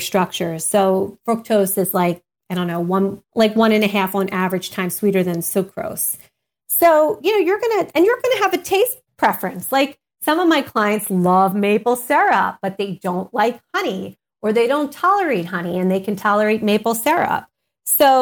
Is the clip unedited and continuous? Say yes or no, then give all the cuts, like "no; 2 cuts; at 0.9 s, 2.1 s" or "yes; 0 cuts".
no; 1 cut; at 3.2 s